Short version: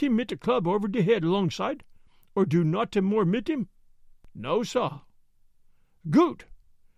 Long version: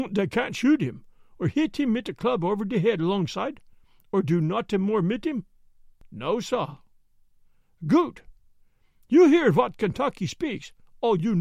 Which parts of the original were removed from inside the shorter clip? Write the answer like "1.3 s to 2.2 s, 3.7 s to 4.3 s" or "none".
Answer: none